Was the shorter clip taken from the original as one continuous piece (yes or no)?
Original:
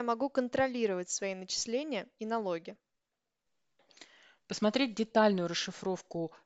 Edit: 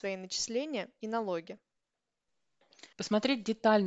no